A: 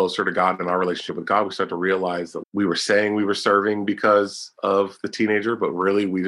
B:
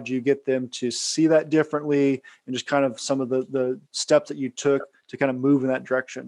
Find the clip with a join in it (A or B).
A